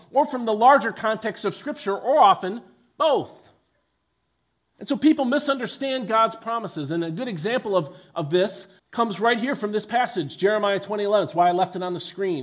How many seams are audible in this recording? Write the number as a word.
one